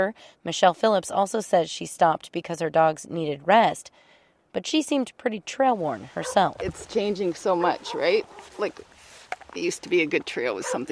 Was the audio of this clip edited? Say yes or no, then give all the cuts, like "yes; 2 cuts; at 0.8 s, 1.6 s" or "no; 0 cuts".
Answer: no; 0 cuts